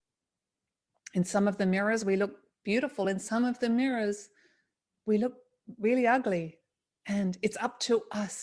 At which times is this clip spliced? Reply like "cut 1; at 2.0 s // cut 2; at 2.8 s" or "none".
none